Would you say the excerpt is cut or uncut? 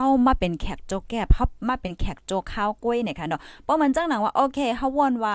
uncut